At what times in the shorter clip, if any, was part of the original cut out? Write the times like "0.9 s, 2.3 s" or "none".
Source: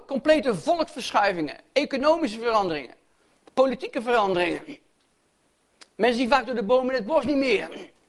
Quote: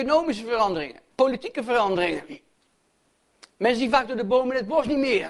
1.1 s